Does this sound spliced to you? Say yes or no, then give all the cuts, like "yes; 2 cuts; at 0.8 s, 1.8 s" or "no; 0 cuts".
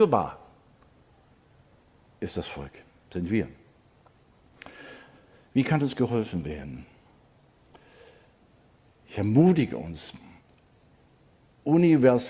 no; 0 cuts